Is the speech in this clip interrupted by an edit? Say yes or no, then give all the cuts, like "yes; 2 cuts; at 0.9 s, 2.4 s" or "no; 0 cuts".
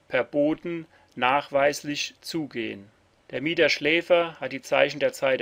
yes; 1 cut; at 3.2 s